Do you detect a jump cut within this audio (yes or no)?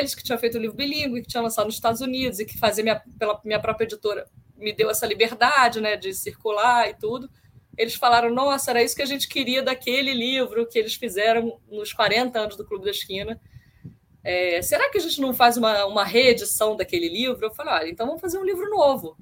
no